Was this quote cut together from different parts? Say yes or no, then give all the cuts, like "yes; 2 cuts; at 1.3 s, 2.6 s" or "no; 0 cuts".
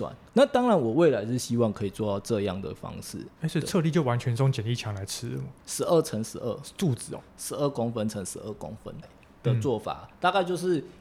yes; 2 cuts; at 5.6 s, 9.0 s